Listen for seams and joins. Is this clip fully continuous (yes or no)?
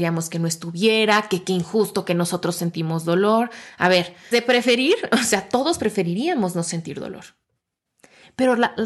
no